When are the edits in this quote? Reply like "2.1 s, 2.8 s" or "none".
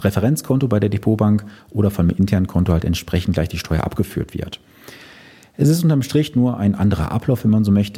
none